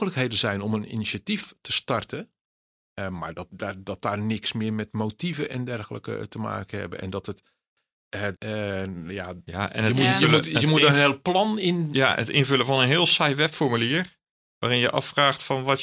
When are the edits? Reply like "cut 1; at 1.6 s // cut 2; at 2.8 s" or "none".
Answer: cut 1; at 3.5 s // cut 2; at 8.3 s